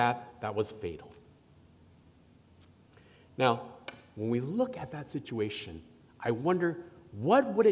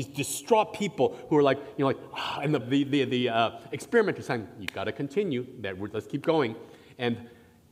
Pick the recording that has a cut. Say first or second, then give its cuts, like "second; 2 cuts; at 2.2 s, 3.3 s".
second; 1 cut; at 2.6 s